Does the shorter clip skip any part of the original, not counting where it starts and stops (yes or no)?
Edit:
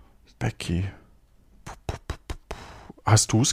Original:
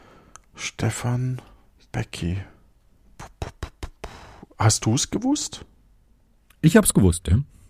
no